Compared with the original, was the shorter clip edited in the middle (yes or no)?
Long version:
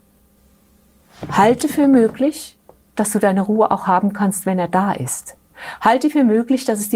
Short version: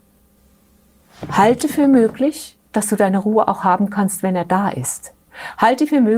yes